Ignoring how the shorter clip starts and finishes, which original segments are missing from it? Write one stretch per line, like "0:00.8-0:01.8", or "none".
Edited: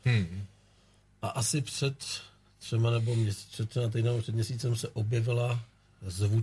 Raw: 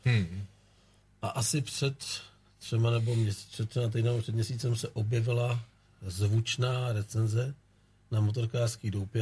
none